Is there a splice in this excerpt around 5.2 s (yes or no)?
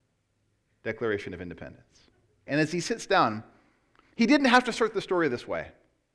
no